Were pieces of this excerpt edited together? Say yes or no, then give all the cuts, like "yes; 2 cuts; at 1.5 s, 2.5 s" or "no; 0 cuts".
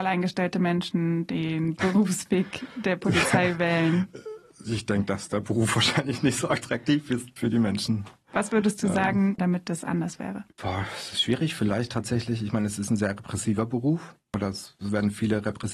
yes; 2 cuts; at 9.4 s, 10.5 s